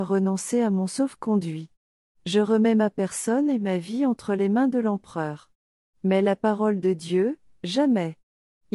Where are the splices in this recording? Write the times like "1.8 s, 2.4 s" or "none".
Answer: none